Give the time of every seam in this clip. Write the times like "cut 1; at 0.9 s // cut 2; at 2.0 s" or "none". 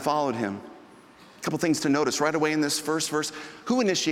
none